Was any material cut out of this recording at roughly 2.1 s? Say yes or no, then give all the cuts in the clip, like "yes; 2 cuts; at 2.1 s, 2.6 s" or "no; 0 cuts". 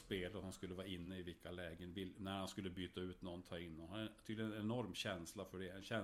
no; 0 cuts